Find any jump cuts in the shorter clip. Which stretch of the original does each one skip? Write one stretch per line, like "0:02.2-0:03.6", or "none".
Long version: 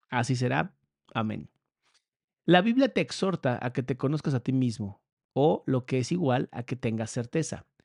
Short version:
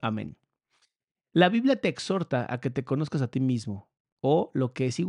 none